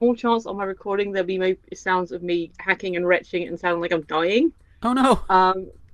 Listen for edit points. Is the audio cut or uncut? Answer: uncut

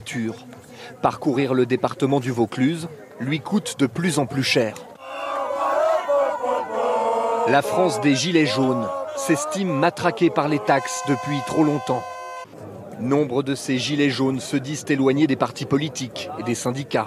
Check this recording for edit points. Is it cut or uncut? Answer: uncut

